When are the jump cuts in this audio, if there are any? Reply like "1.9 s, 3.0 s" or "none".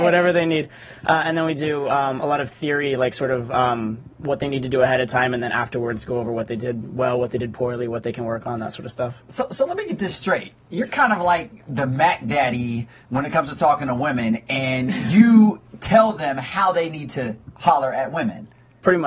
none